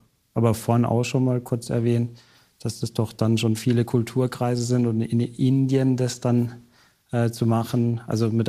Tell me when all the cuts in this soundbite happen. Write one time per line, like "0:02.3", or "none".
none